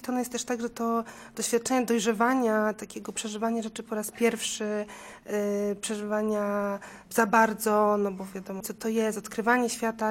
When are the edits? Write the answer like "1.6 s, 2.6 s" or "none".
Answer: 8.6 s